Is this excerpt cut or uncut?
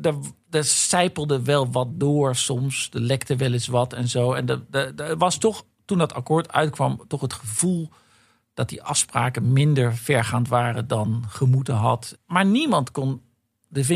cut